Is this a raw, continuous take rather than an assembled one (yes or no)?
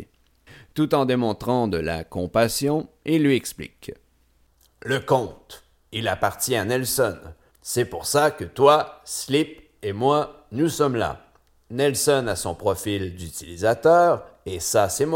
no